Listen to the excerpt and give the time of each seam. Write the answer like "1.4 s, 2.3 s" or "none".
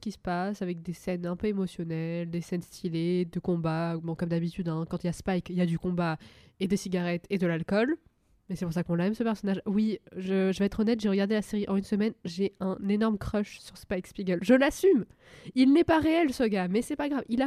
none